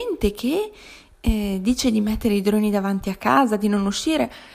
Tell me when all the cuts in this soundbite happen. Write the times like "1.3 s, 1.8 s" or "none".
none